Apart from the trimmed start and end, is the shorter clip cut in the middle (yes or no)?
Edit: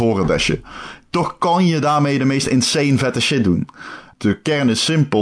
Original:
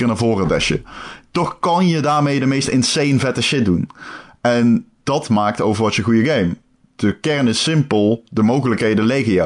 yes